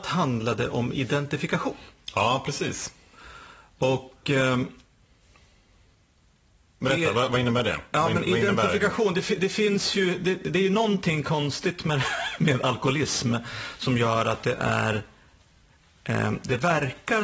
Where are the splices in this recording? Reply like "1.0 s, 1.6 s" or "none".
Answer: none

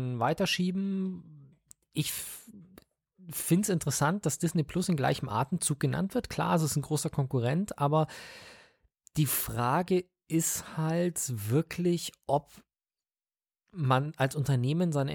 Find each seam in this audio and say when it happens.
none

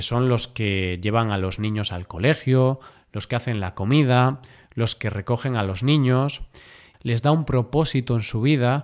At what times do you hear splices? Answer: 6.9 s

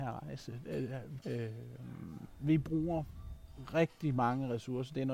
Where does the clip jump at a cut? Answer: 1.2 s

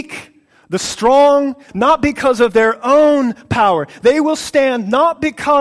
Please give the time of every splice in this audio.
1.7 s

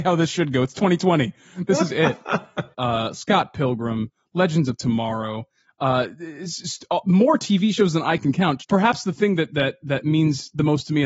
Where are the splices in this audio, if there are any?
2.7 s

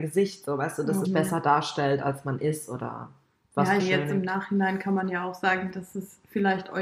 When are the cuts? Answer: 1.0 s, 3.8 s

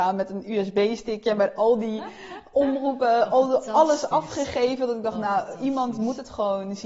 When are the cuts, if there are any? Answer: none

